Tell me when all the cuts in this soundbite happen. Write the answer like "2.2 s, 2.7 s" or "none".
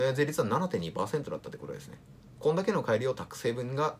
none